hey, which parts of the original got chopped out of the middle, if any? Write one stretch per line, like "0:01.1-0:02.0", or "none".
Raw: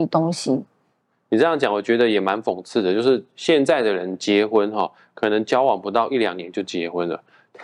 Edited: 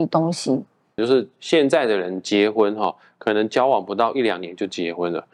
0:01.0-0:02.9